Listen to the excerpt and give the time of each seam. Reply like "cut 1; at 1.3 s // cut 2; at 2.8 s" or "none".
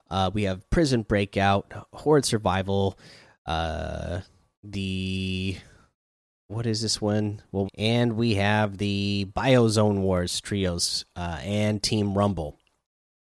cut 1; at 7.6 s